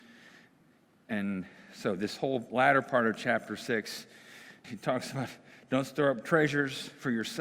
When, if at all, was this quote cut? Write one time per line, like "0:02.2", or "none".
0:04.6